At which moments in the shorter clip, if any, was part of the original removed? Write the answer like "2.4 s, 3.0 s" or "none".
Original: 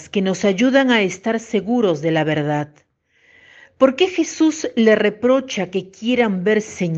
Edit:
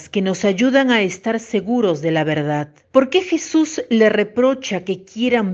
2.8 s